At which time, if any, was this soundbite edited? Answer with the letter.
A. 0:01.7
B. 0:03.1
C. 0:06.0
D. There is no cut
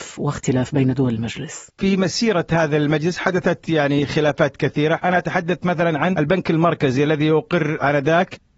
A